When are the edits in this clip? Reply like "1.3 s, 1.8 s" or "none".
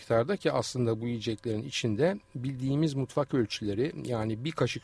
none